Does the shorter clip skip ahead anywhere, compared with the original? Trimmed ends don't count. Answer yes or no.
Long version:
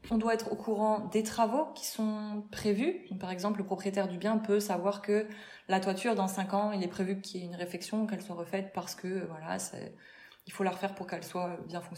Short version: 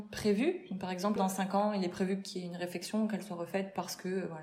yes